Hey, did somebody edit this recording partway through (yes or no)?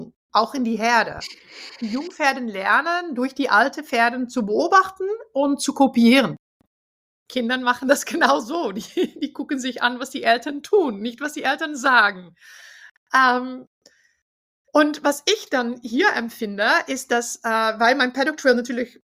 no